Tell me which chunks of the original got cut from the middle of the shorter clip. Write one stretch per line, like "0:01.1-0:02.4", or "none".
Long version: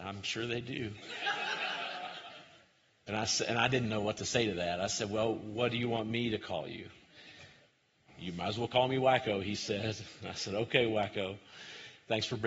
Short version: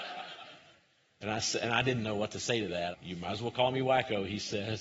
0:04.8-0:08.1